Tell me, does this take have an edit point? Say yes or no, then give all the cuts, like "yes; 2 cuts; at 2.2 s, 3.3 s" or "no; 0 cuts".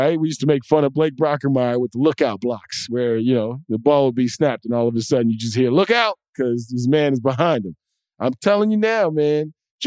no; 0 cuts